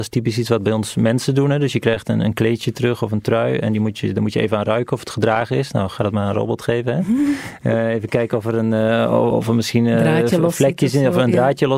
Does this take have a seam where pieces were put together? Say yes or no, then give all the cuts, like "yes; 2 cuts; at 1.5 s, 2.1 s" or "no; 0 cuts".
yes; 1 cut; at 9.3 s